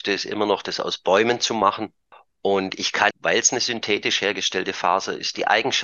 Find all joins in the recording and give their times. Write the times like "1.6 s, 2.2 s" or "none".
3.1 s